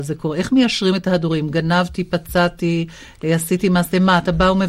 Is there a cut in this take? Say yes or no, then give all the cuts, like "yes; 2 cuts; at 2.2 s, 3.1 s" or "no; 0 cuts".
no; 0 cuts